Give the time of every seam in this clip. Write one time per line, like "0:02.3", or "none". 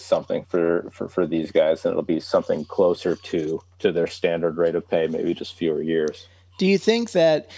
none